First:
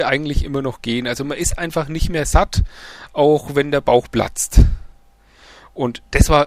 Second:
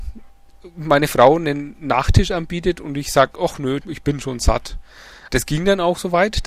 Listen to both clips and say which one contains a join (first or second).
second